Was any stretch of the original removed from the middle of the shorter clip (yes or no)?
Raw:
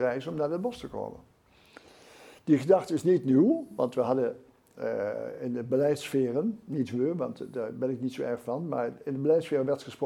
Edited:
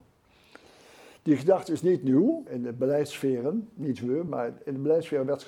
yes